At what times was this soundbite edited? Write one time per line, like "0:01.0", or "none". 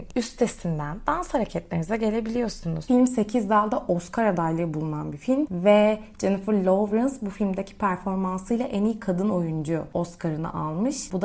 0:02.9